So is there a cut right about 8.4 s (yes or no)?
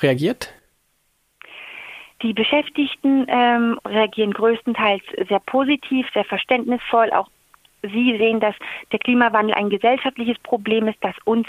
no